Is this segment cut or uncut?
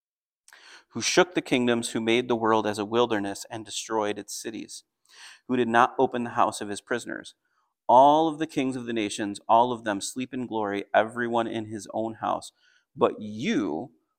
uncut